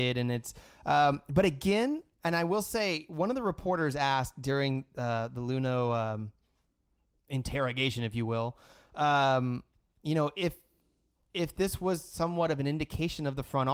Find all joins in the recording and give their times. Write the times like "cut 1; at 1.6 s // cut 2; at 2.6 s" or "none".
none